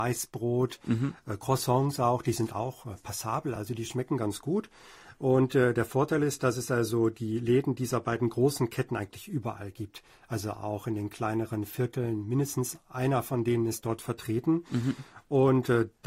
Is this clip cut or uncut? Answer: uncut